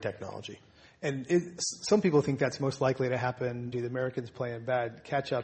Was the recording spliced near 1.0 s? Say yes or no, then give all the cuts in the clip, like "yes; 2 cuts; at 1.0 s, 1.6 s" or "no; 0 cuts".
no; 1 cut; at 3.7 s